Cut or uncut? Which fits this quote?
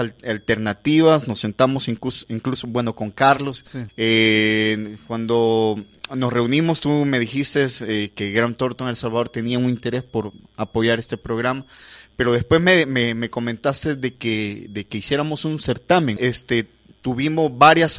cut